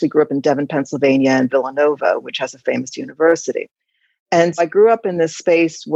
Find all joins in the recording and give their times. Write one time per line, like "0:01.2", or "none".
0:01.5
0:04.6